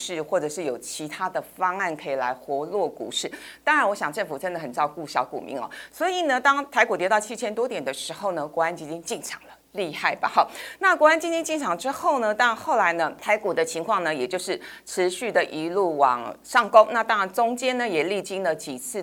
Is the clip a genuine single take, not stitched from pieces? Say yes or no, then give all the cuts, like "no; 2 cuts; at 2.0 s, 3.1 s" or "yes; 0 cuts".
yes; 0 cuts